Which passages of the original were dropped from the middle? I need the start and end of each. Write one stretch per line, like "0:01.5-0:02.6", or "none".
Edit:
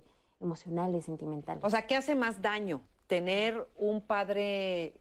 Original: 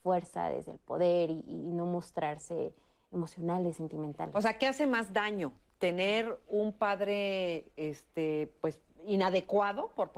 none